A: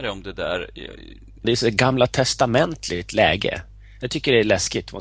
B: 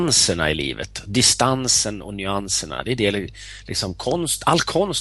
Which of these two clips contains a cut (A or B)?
A